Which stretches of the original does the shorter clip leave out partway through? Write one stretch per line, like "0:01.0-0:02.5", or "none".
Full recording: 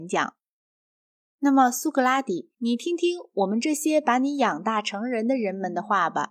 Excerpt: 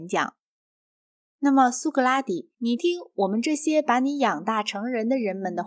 0:02.8-0:03.0